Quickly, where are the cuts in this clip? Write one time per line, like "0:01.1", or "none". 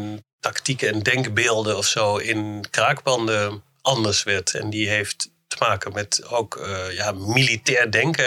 0:04.5